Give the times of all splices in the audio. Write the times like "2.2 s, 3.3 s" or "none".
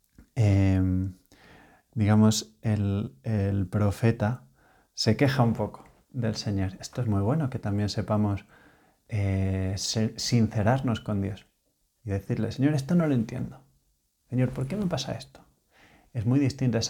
none